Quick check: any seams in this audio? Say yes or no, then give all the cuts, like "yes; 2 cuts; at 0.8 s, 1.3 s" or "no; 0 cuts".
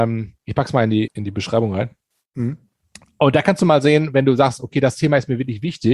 yes; 1 cut; at 1.1 s